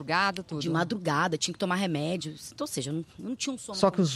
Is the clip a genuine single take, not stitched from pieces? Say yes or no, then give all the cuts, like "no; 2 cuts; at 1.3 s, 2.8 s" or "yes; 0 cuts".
yes; 0 cuts